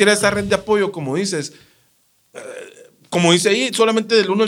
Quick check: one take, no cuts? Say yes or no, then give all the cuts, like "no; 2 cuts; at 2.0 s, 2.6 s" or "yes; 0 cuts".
yes; 0 cuts